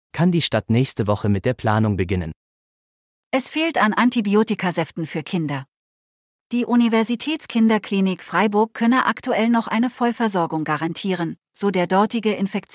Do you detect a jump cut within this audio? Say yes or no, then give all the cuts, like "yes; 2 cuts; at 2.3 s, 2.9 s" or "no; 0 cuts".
no; 0 cuts